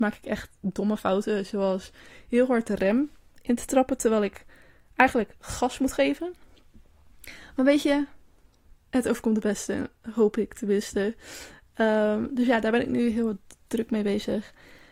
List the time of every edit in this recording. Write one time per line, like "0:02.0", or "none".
none

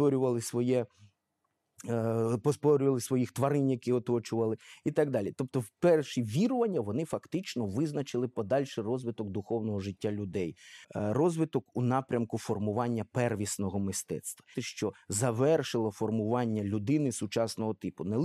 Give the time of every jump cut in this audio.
0:10.8
0:14.5

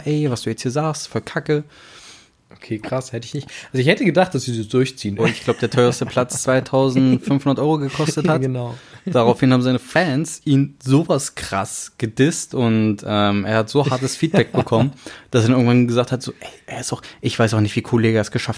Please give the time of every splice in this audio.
0:05.2

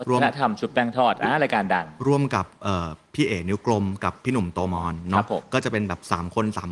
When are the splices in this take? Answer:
none

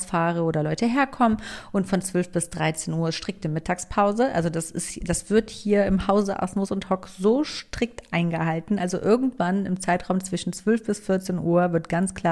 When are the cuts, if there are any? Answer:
none

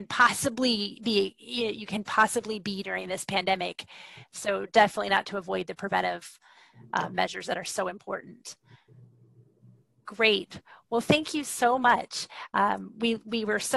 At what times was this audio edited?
none

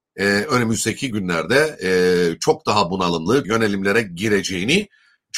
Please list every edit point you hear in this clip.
0:03.4

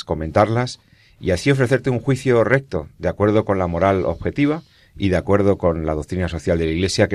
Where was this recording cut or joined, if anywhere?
none

